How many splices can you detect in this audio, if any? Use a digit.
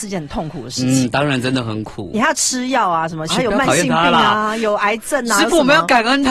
1